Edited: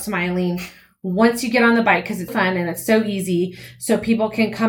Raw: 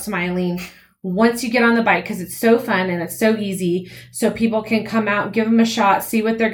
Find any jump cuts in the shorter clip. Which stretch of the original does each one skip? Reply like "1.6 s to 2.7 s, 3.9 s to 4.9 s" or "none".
2.3 s to 2.6 s